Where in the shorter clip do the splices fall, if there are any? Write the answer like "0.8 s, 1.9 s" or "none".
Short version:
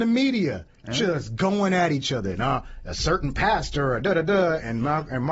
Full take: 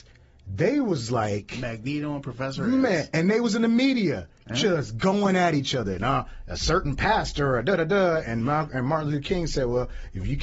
none